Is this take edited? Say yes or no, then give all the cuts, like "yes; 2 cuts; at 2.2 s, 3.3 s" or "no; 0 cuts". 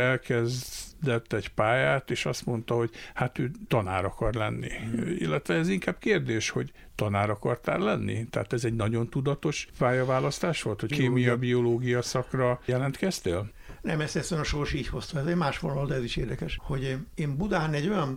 no; 0 cuts